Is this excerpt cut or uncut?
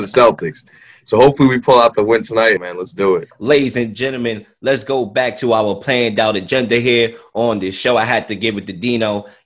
cut